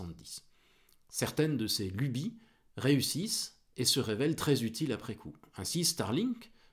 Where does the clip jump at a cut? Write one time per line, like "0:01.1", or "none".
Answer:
none